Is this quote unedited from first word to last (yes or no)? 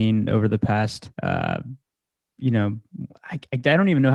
no